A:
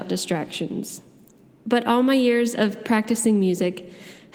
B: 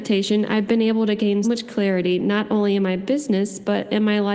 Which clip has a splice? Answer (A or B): B